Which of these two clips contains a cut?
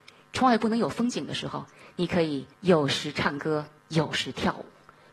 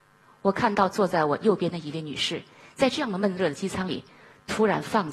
first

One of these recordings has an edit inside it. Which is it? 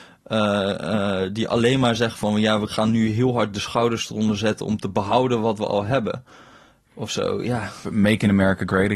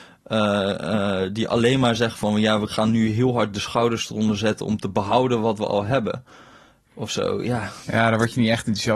first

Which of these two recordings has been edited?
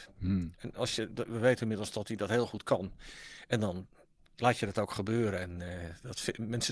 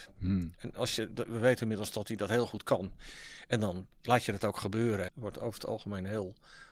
second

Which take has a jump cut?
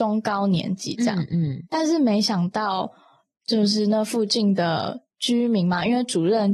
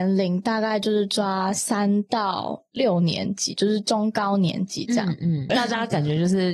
second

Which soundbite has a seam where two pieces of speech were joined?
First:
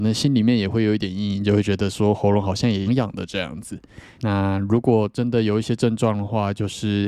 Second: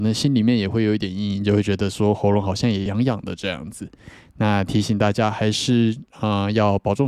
first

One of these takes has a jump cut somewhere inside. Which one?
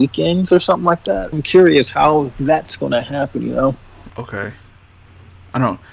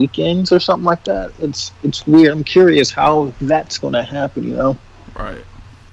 first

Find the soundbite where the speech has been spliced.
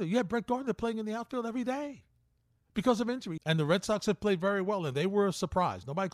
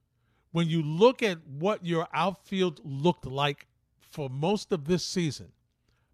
first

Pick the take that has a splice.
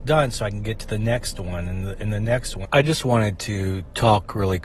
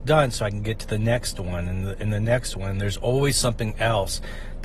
first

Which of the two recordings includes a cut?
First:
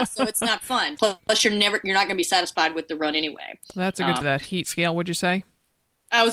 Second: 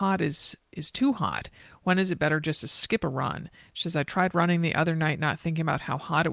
first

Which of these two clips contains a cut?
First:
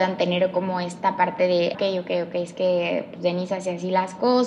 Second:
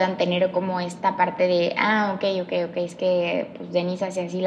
first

